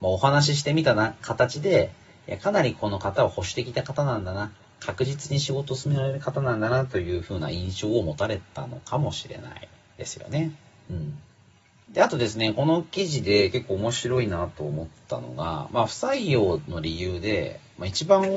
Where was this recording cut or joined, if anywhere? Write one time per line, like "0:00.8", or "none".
none